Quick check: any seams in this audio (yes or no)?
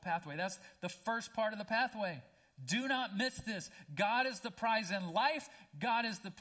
no